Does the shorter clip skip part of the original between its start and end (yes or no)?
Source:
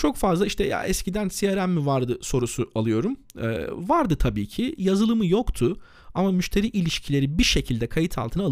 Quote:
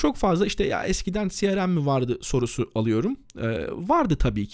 no